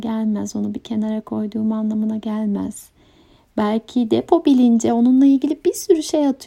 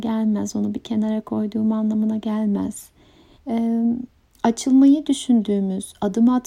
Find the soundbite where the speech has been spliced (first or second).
second